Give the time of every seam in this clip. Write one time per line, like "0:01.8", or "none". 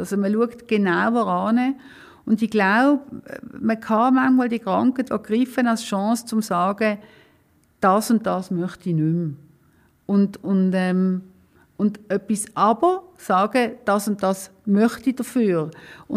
0:05.1